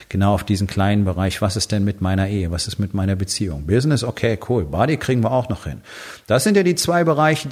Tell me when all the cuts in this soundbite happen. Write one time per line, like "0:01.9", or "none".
none